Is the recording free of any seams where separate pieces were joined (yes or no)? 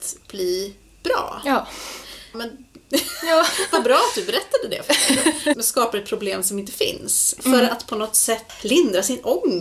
no